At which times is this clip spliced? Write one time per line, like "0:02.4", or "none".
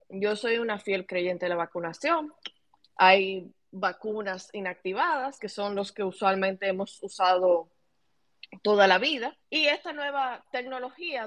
0:05.4
0:09.4